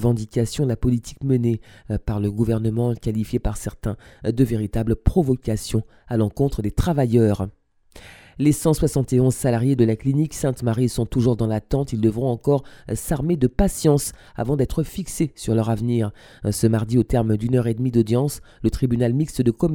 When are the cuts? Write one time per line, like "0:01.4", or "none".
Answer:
none

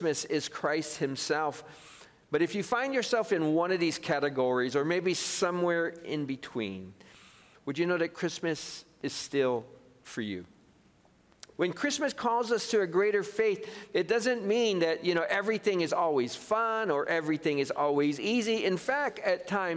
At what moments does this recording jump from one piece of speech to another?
0:11.6

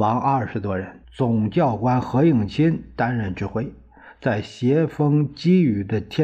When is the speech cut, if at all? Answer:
0:01.0

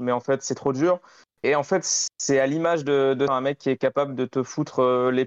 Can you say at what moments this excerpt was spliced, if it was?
0:01.4
0:03.3

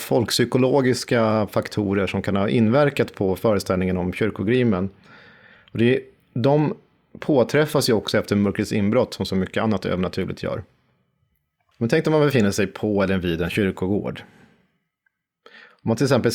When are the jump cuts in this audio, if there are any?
none

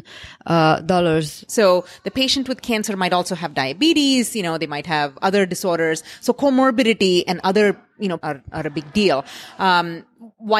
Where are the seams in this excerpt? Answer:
0:01.5
0:08.2

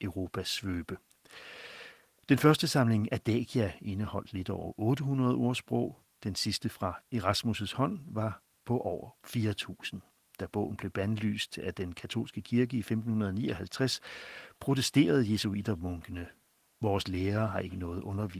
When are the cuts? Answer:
none

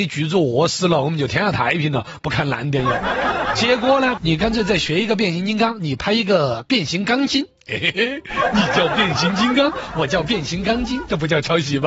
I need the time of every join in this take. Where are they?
0:04.2

